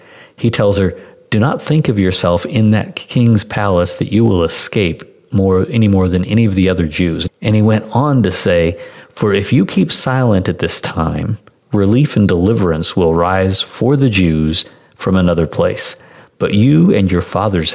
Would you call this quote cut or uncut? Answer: cut